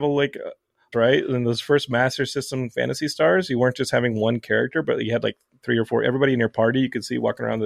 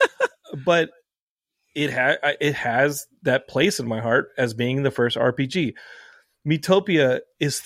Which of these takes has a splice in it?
first; 1 cut; at 0.9 s

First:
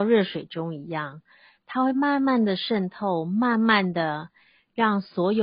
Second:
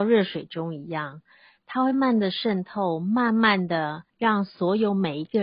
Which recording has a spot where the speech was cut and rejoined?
second; 2 cuts; at 1.9 s, 4.1 s

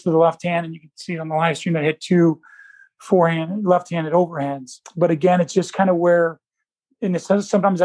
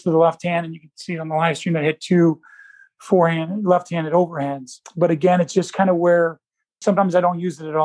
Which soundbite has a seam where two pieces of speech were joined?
second; 1 cut; at 6.8 s

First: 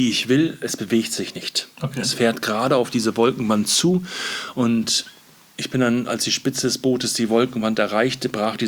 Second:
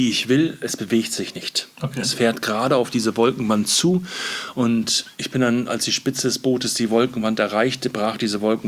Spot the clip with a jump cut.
second; 1 cut; at 5.1 s

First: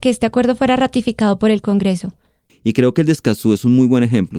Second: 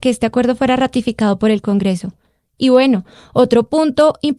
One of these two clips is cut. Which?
first; 1 cut; at 2.5 s

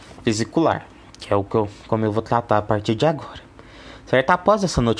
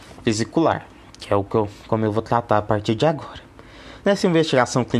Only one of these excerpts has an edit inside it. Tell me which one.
second; 1 cut; at 4.0 s

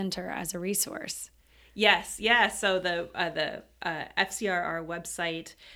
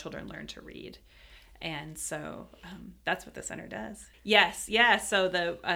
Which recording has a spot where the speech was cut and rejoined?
second; 1 cut; at 4.1 s

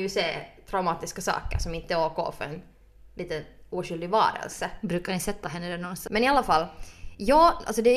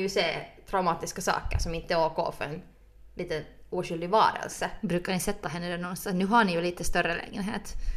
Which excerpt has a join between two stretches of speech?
first; 1 cut; at 6.1 s

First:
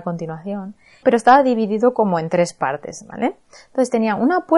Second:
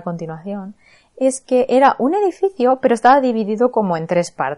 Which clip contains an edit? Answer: first; 1 cut; at 1.0 s

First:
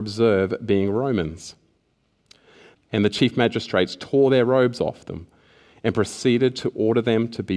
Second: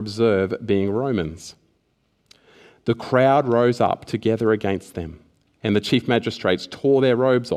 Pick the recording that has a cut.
first; 1 cut; at 2.7 s

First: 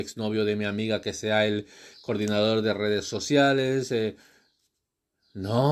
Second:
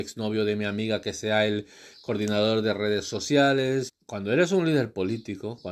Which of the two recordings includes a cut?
second; 1 cut; at 3.9 s

